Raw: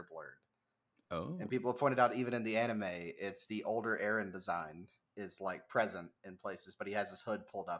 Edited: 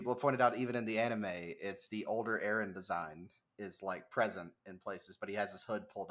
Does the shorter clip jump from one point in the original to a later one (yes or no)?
no